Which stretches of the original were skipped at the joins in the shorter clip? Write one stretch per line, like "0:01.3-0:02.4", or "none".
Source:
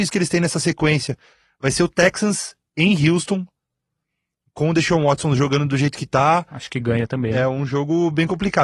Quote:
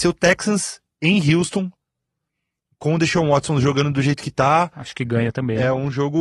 none